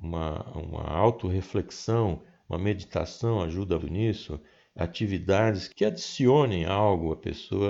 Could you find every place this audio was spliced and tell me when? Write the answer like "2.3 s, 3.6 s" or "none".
3.8 s